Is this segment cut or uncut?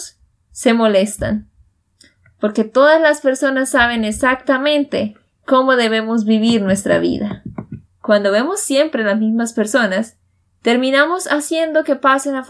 cut